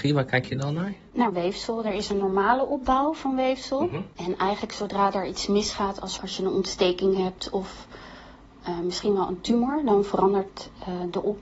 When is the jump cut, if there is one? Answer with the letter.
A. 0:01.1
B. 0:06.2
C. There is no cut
B